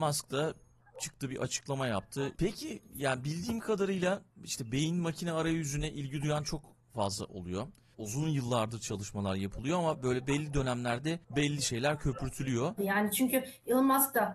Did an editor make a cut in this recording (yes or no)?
yes